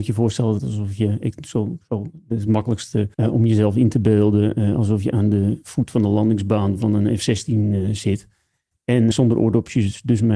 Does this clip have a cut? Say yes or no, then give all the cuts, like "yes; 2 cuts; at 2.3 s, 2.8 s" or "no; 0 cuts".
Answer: yes; 2 cuts; at 3.1 s, 9.1 s